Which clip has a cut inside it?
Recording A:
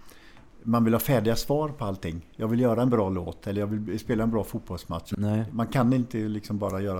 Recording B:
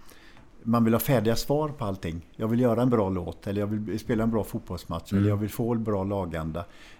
A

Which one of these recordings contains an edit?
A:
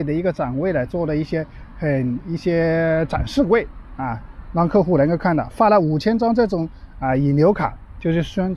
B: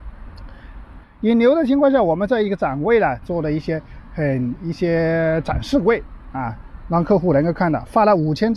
B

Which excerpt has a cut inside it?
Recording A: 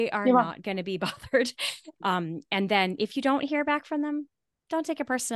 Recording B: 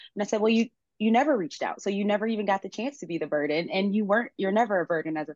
A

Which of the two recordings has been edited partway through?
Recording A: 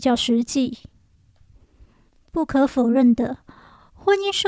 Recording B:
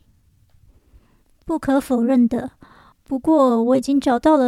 B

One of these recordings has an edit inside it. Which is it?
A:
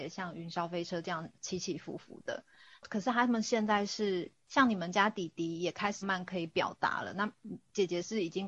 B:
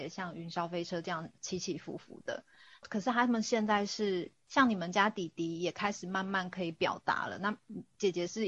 A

